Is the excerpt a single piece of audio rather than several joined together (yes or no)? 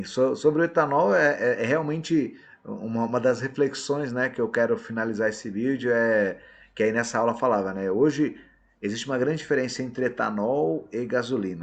yes